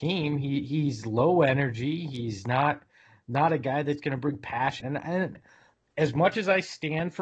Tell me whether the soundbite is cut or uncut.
cut